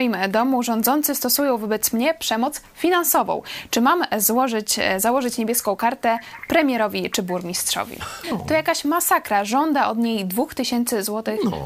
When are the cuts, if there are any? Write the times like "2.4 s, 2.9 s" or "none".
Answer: 8.2 s